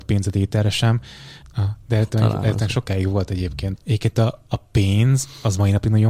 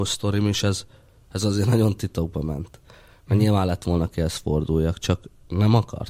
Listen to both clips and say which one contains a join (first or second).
first